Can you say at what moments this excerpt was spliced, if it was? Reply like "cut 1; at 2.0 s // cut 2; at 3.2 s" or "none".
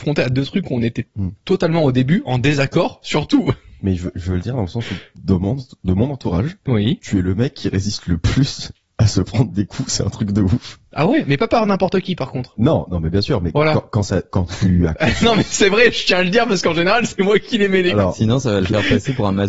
none